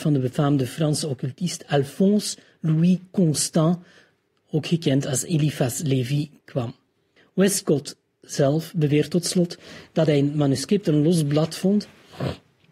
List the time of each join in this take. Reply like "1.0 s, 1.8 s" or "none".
7.2 s